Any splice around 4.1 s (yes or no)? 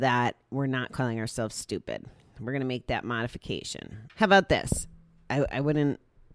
yes